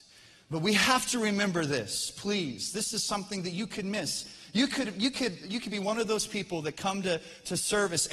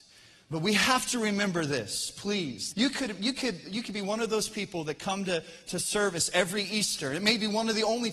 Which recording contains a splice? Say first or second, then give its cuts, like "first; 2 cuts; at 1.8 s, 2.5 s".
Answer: second; 1 cut; at 2.7 s